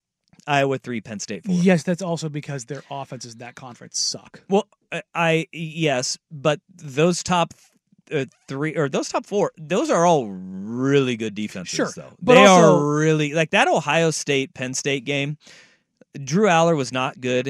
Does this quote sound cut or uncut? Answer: uncut